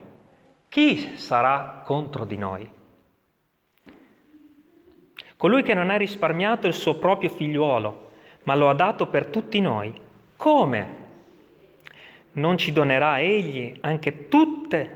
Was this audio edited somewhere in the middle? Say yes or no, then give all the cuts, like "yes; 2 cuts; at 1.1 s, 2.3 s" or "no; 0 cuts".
no; 0 cuts